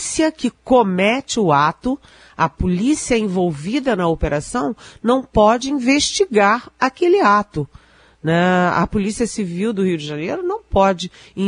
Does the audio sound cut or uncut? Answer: uncut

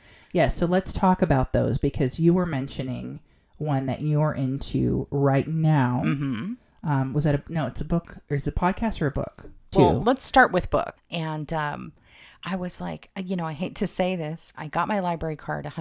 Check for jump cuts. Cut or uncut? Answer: cut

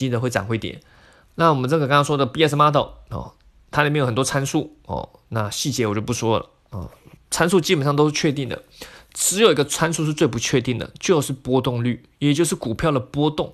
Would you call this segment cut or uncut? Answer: cut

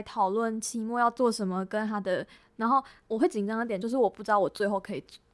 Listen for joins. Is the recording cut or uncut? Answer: cut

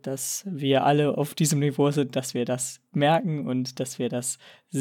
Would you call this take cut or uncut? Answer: uncut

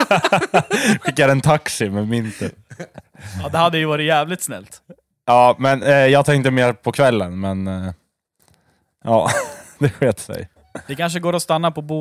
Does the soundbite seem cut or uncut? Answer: uncut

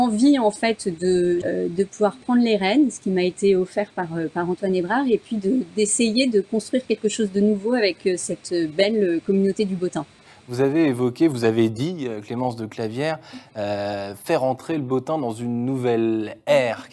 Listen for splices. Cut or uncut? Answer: cut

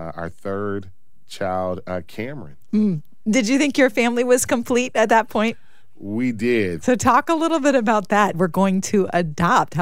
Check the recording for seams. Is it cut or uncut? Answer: cut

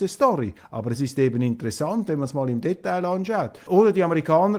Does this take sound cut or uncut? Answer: cut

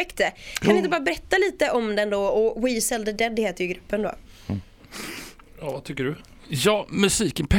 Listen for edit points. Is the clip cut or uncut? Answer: uncut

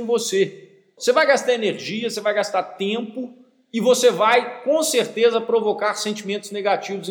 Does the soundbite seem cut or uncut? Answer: cut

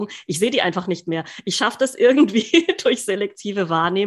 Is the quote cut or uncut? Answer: uncut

